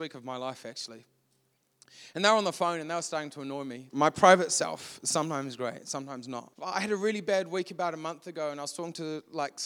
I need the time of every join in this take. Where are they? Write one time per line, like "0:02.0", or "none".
0:03.9
0:06.5